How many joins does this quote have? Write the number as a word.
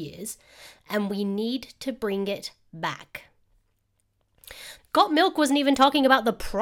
one